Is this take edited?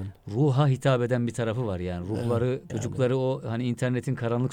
yes; 1 cut; at 2.7 s

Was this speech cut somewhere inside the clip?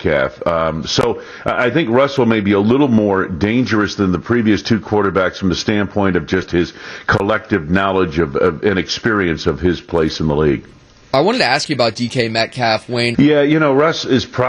yes; 1 cut; at 13.1 s

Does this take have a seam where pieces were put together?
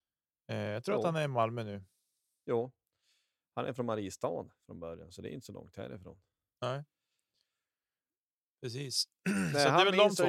no; 0 cuts

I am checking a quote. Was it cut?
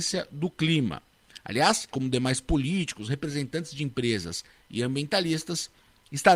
yes; 1 cut; at 1.9 s

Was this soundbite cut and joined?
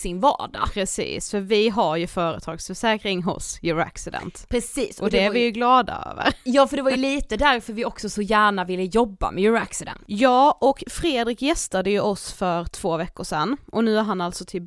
no; 0 cuts

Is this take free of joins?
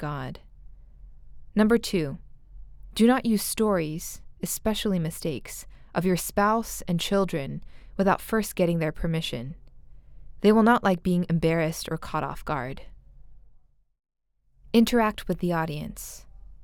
no; 1 cut; at 14.6 s

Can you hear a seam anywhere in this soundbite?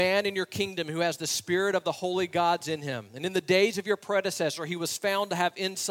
no; 0 cuts

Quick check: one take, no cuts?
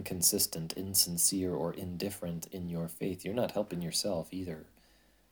yes; 0 cuts

